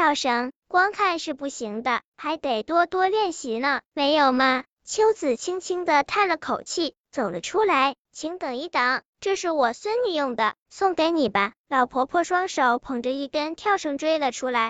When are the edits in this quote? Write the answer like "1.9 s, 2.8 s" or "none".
3.9 s